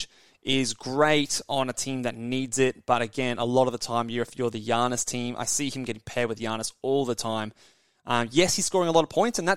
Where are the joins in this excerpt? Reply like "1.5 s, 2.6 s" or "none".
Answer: 7.9 s